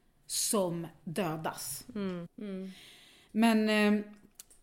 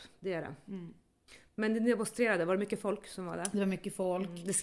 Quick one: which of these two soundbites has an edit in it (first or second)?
first